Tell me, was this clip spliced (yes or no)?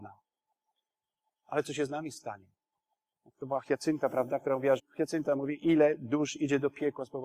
yes